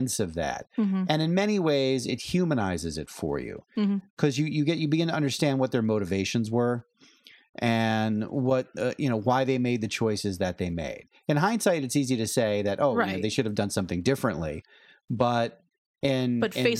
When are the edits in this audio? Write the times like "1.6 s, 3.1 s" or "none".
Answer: none